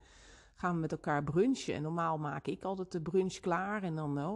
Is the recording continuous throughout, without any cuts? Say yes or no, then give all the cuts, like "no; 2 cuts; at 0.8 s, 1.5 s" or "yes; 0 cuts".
yes; 0 cuts